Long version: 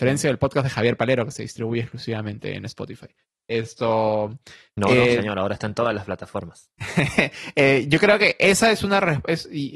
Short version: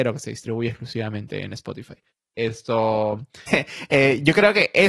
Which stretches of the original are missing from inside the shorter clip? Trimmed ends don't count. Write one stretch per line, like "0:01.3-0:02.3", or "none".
0:04.6-0:07.1